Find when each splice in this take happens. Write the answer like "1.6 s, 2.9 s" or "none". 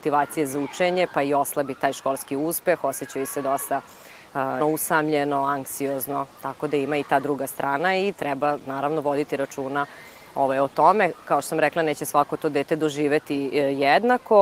4.6 s